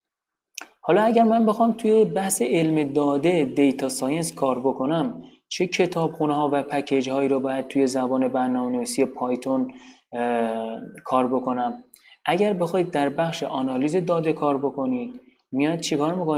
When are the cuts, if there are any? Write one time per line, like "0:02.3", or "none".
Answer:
none